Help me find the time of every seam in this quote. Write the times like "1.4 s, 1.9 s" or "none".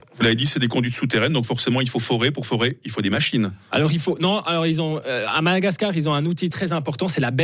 6.5 s